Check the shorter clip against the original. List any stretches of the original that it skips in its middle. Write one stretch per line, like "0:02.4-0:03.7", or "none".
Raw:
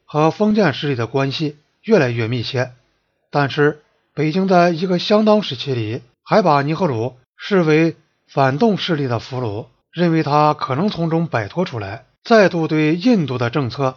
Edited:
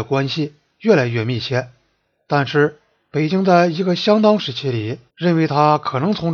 0:06.1-0:09.8